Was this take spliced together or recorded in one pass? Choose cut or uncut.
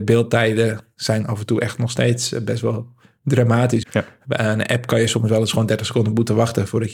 cut